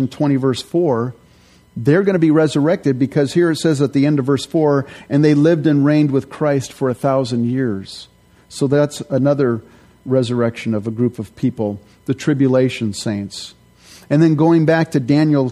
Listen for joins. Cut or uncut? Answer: uncut